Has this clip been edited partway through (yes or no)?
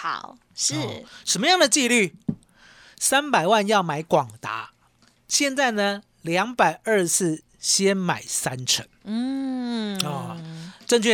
no